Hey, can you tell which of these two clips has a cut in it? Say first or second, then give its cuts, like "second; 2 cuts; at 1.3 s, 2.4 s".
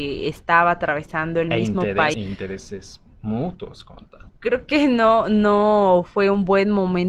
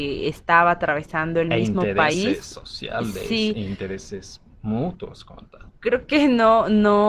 first; 1 cut; at 2.1 s